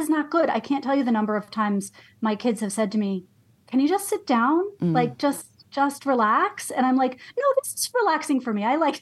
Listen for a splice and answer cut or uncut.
uncut